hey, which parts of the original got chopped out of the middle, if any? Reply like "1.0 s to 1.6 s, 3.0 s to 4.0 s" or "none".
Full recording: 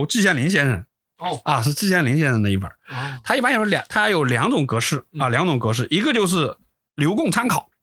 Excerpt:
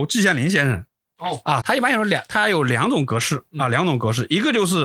1.6 s to 3.2 s

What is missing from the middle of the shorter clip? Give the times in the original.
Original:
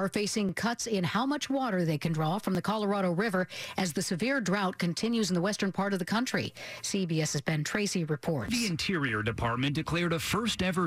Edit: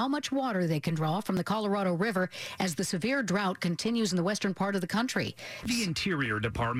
6.8 s to 8.5 s

